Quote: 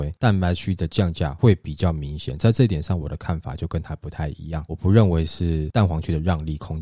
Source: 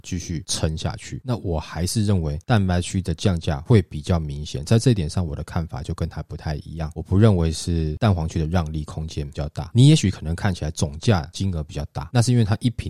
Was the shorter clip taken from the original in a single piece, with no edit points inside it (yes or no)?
yes